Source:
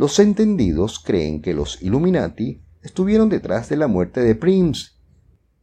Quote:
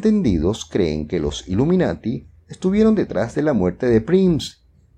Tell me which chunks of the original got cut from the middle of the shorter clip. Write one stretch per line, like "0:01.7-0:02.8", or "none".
none